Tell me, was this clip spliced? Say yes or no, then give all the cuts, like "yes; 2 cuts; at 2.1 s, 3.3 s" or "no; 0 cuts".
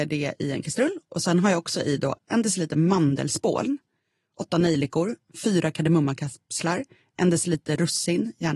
no; 0 cuts